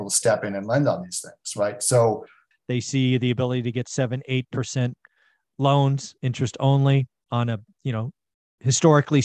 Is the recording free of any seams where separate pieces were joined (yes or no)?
no